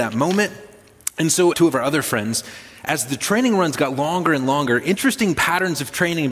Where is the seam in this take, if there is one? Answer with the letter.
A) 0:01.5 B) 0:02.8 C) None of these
A